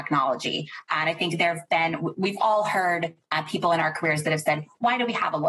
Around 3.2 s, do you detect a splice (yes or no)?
yes